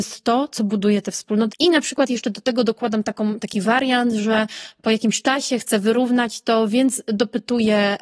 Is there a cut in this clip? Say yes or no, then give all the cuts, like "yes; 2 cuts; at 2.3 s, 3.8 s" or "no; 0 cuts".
yes; 1 cut; at 1.5 s